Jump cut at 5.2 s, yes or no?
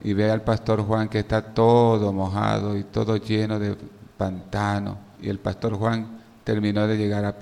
yes